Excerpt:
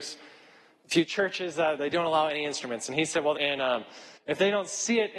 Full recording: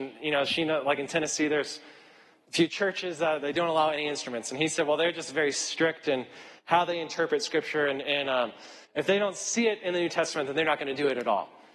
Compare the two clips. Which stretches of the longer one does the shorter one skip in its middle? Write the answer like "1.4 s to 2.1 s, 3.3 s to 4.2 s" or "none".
5.0 s to 8.0 s